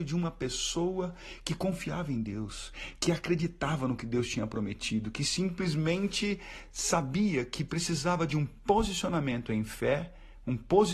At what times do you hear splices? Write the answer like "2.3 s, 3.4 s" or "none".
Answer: none